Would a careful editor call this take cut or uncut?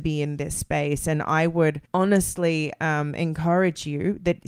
cut